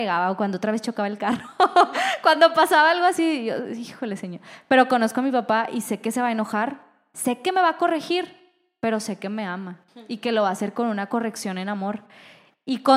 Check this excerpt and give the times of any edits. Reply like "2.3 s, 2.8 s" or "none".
none